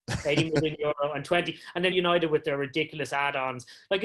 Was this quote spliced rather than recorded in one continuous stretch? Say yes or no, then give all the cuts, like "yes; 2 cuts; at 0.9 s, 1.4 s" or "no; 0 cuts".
yes; 1 cut; at 1.9 s